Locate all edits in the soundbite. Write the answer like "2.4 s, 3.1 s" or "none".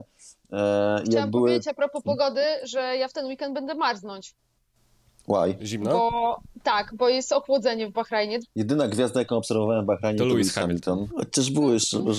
6.9 s, 8.4 s, 11.1 s